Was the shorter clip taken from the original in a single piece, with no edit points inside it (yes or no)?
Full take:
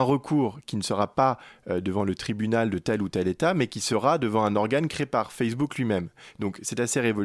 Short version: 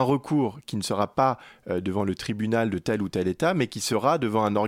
yes